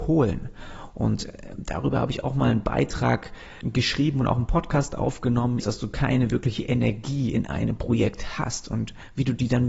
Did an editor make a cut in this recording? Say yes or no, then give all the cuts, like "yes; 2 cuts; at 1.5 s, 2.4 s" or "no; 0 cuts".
yes; 2 cuts; at 3.6 s, 5.6 s